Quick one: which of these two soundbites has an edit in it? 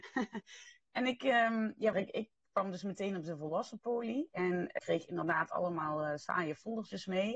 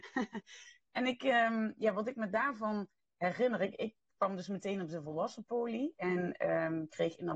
first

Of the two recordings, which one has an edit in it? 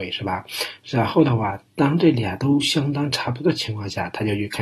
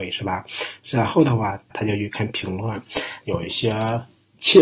second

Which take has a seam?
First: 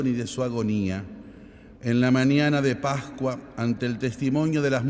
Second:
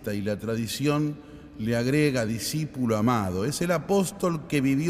first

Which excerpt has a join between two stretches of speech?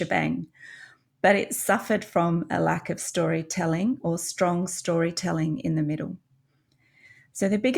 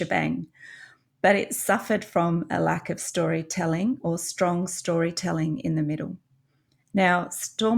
second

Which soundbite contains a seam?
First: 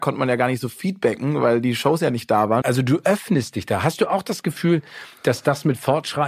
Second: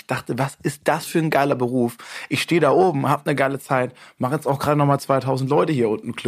first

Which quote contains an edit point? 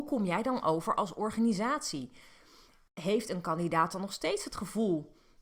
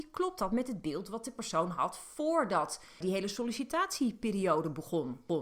second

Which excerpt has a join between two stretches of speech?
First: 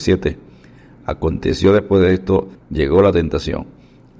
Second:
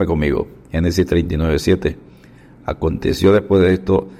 first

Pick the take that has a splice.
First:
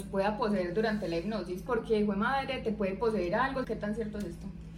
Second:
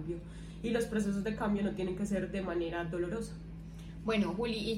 first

